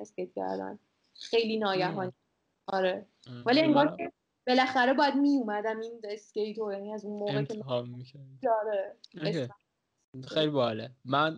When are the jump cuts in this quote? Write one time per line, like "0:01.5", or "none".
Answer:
0:09.0